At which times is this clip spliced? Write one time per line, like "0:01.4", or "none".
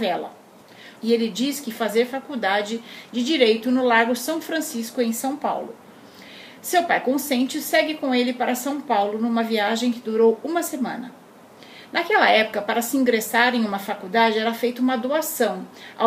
0:01.0